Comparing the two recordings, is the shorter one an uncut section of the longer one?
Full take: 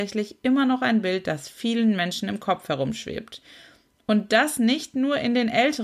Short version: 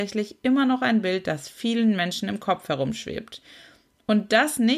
yes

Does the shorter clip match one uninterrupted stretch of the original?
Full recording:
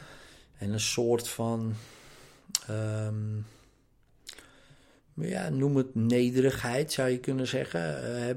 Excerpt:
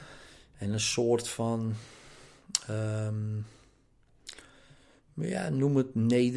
yes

